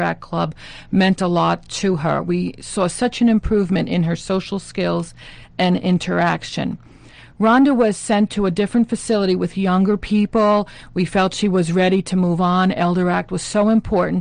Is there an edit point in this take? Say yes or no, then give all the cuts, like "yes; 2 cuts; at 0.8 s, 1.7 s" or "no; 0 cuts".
no; 0 cuts